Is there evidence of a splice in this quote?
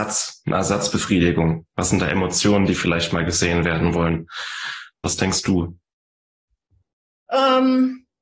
yes; 1 cut; at 5.0 s

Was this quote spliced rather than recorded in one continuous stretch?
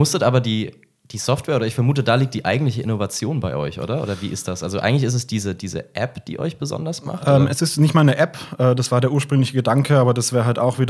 no; 0 cuts

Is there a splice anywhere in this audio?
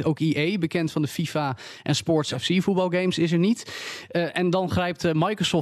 no; 0 cuts

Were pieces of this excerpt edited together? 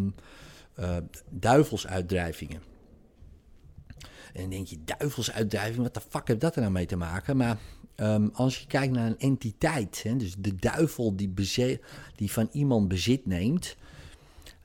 no; 0 cuts

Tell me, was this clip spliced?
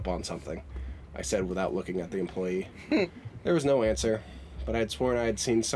no; 0 cuts

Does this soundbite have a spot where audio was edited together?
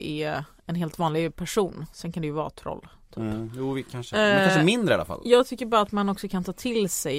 no; 0 cuts

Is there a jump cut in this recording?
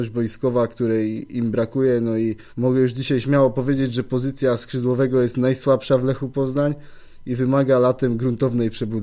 yes; 1 cut; at 2.5 s

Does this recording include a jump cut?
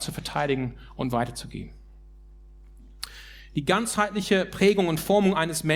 no; 0 cuts

